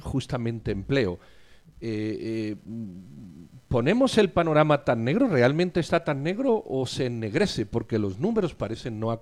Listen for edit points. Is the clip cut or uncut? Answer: uncut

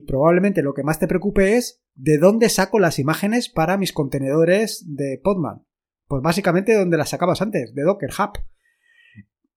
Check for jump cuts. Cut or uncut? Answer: uncut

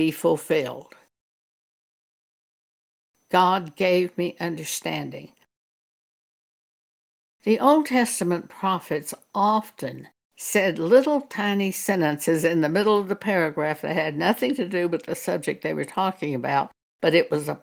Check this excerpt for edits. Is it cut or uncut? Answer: cut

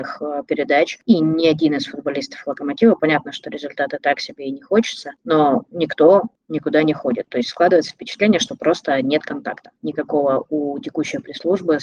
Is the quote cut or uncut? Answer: uncut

